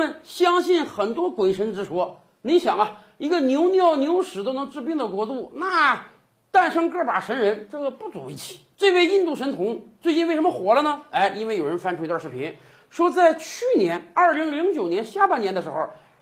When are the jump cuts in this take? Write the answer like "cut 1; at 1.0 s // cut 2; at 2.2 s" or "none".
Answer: none